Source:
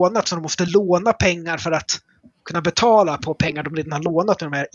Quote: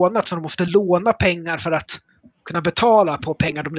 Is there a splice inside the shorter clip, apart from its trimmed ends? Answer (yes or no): no